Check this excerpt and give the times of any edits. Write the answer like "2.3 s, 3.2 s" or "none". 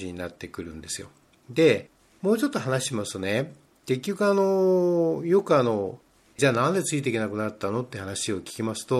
none